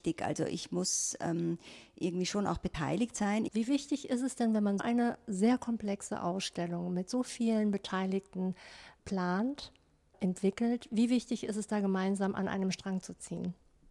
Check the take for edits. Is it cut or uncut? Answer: cut